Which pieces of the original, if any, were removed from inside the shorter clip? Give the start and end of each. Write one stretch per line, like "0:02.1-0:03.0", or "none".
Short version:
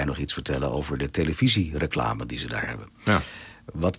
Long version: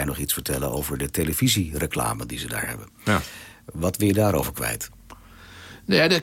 none